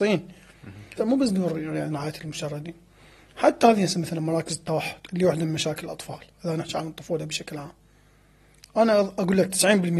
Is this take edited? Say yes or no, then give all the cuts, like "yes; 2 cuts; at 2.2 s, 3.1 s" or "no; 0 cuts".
yes; 1 cut; at 1.0 s